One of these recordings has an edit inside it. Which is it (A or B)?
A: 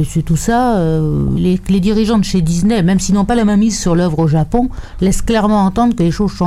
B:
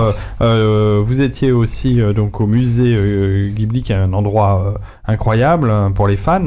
A